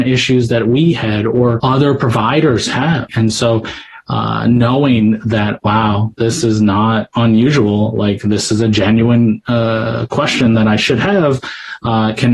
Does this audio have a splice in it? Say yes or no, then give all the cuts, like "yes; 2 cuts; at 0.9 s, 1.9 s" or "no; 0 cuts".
no; 0 cuts